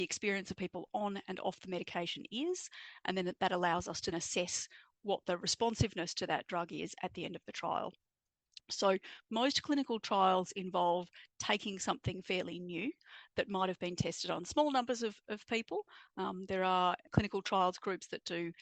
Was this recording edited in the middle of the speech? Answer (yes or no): yes